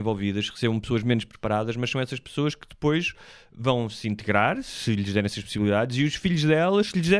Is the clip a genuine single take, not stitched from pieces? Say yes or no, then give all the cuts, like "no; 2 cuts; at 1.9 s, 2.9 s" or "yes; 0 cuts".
yes; 0 cuts